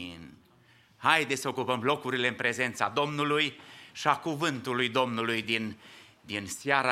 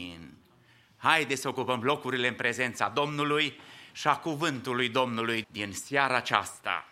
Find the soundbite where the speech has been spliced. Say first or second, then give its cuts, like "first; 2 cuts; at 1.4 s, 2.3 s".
second; 1 cut; at 5.4 s